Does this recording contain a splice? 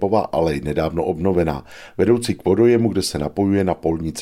no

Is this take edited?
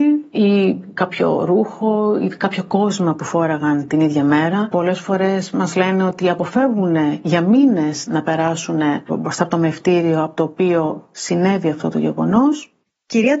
no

